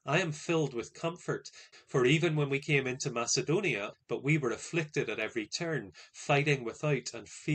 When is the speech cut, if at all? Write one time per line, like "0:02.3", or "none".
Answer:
0:01.7
0:03.9